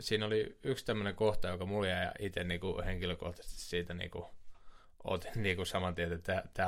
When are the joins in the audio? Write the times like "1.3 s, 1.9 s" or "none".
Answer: none